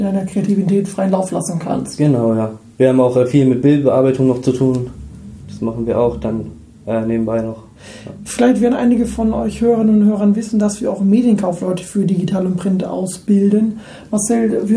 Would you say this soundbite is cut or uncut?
uncut